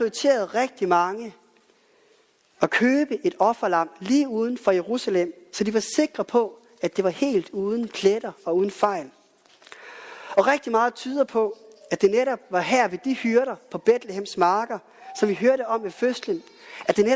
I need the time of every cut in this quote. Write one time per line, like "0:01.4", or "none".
none